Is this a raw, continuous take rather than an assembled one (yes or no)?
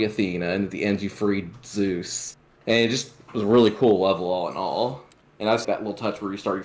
no